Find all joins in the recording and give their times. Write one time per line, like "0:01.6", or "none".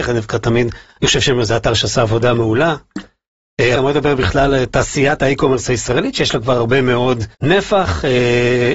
0:03.8
0:07.3